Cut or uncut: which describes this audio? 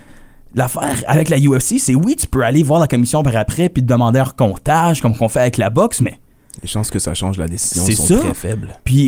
uncut